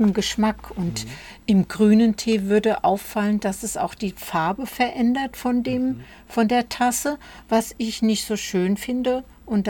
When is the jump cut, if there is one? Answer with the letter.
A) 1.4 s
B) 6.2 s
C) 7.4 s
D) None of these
D